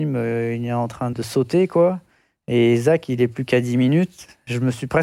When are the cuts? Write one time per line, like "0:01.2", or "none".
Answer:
0:01.1